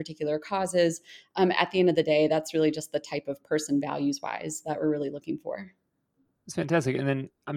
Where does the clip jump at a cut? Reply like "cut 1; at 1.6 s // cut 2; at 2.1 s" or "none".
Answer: none